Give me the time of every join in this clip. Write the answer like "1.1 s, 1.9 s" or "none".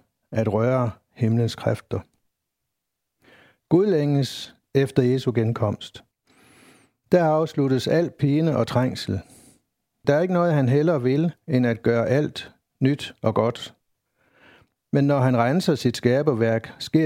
none